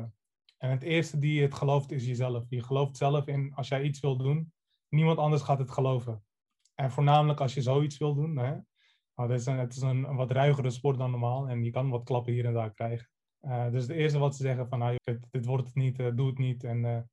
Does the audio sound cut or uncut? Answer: cut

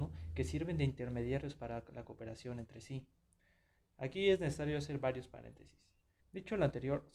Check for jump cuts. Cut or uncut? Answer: cut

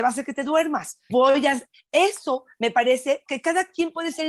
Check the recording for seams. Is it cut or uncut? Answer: cut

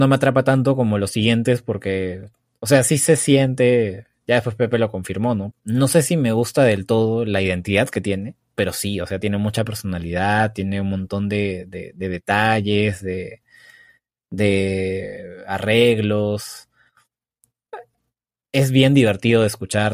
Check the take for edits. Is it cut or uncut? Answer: cut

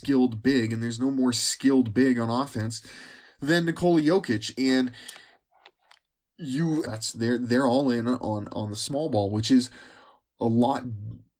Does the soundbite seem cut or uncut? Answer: cut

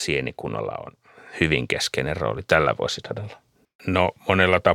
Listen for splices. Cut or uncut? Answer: cut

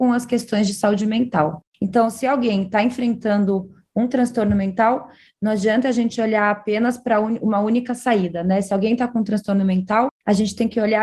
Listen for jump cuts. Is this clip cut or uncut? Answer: uncut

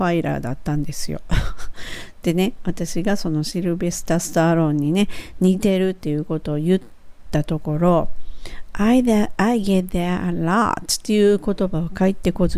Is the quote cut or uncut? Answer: uncut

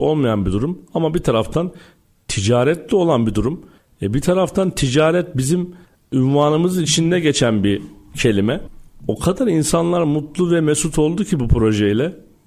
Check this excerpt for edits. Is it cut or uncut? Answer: uncut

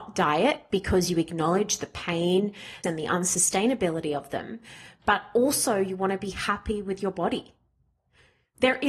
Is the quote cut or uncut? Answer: cut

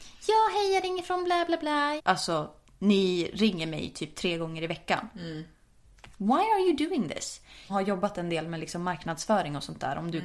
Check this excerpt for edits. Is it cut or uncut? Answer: cut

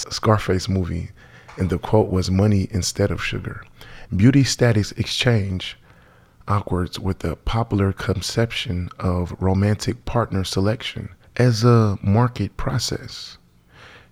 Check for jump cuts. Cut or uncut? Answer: cut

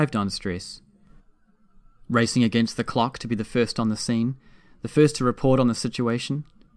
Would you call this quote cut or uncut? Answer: uncut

